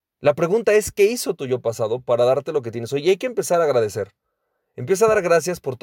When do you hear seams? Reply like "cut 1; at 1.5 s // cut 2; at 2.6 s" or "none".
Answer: none